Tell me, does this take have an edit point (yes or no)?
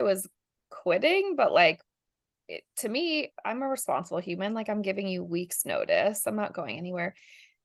no